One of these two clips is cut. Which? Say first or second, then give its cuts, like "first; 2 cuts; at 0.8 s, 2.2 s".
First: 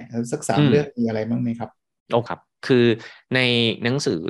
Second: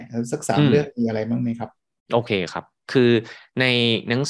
first; 1 cut; at 2.3 s